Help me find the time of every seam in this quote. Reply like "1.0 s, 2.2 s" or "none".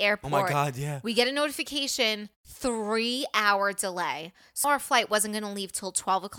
2.3 s, 4.6 s